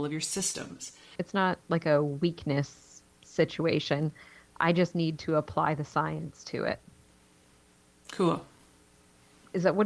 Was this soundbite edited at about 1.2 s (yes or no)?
yes